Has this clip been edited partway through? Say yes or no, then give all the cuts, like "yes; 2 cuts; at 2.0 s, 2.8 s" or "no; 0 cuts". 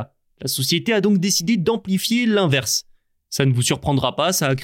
no; 0 cuts